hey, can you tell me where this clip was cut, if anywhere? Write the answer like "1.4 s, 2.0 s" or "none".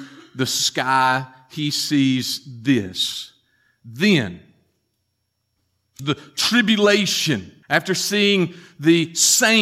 6.0 s, 7.6 s